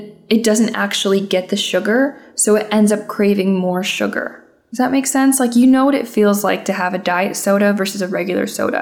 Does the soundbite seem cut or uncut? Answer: uncut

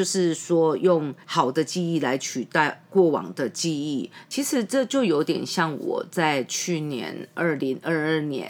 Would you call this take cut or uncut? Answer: cut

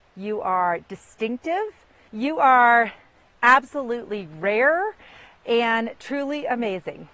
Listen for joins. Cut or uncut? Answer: cut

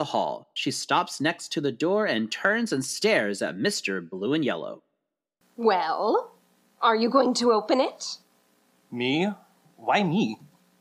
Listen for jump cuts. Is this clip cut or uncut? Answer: uncut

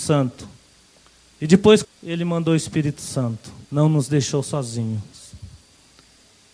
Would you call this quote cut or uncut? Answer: cut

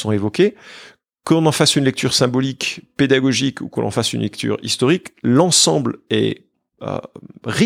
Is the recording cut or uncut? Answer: uncut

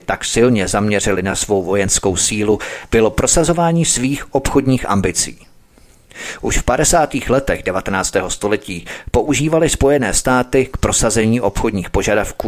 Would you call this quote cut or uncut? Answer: uncut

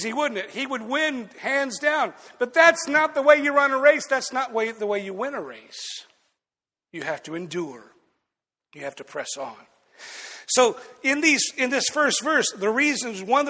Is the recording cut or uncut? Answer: uncut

